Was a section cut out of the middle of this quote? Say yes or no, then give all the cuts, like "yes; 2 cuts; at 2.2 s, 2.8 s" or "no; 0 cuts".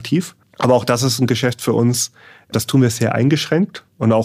no; 0 cuts